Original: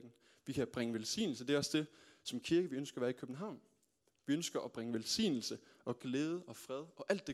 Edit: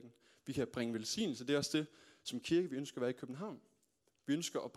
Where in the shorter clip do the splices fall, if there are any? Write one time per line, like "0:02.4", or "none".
none